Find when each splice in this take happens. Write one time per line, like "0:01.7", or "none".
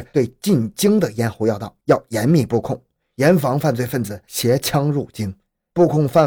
none